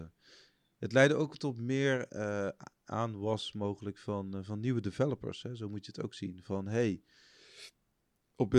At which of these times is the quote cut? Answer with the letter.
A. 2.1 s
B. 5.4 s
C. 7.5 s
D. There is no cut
A